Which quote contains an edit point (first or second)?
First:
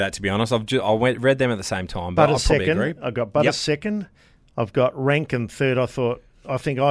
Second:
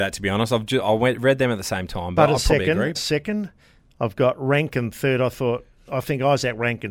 second